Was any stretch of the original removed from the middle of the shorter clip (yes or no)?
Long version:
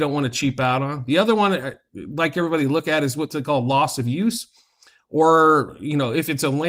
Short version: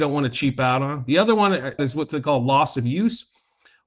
yes